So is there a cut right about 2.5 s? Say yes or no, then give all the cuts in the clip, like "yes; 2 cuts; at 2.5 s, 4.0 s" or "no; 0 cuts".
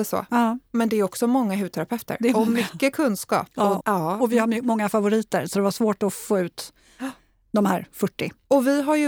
no; 1 cut; at 3.8 s